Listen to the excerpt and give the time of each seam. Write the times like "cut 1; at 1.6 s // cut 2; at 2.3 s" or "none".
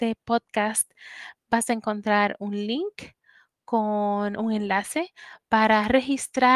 none